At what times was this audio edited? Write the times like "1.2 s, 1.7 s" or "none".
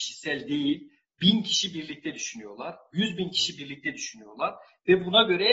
none

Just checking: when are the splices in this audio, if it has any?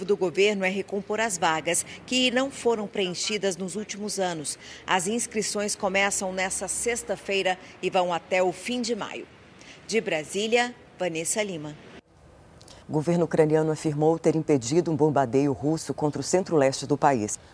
12.8 s

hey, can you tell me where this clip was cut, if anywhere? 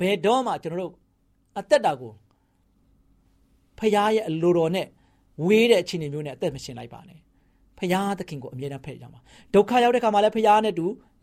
none

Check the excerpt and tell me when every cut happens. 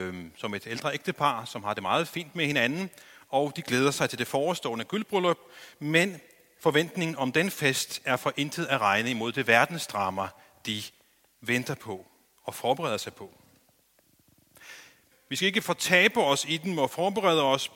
15.1 s

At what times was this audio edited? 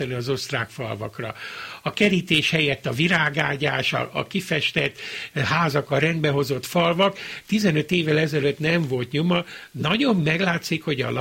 4.1 s

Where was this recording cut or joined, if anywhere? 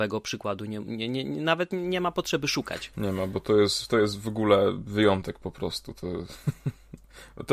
2.9 s

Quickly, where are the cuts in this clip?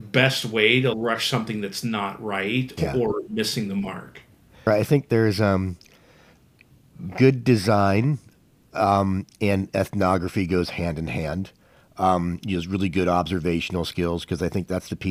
4.7 s

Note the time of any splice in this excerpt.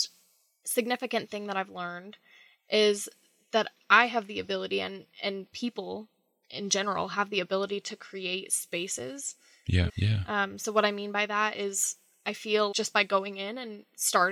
9.9 s, 12.7 s

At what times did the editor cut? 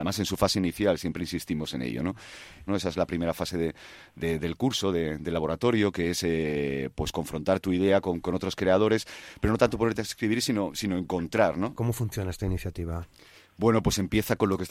2.7 s, 11.7 s

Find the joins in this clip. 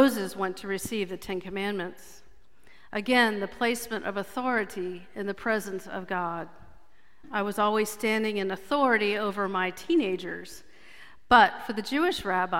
7.2 s

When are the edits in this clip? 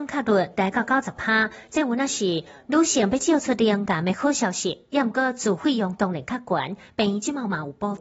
5.6 s

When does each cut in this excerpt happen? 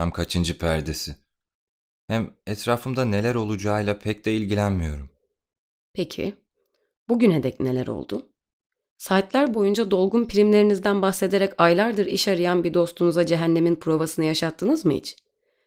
none

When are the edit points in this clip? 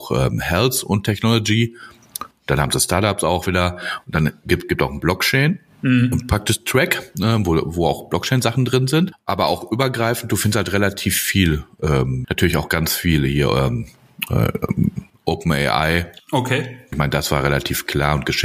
12.2 s, 16.9 s

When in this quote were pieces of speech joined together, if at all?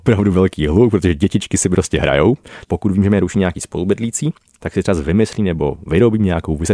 2.6 s

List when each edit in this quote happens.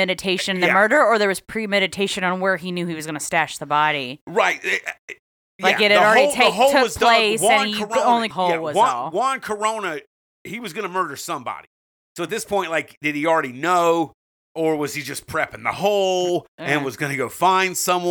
8.3 s

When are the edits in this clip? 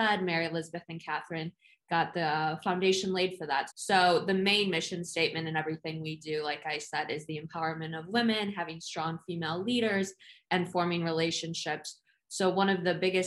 3.7 s

